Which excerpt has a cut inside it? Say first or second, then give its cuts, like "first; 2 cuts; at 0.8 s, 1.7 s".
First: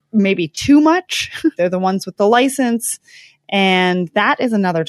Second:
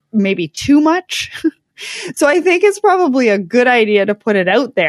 first; 1 cut; at 1.6 s